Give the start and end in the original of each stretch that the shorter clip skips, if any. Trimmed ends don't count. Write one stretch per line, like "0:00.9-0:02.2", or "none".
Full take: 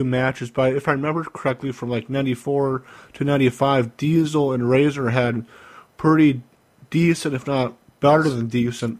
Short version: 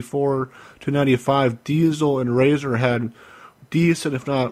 0:05.9-0:06.8